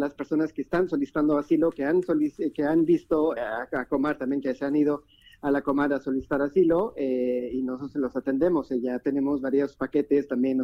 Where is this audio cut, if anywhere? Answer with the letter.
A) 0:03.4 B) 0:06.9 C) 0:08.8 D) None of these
A